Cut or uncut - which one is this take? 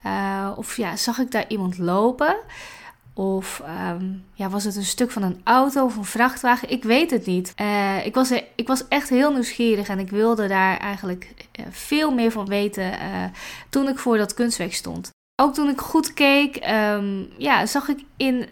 cut